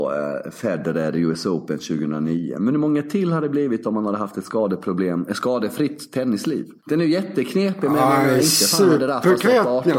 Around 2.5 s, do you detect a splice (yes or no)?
no